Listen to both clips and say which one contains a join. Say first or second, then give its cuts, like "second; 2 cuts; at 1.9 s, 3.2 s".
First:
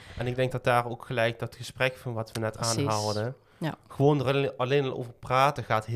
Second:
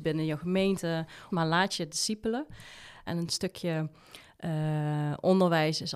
second; 2 cuts; at 1.3 s, 3.1 s